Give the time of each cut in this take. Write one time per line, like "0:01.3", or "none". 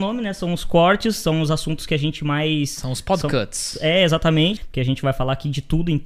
0:04.6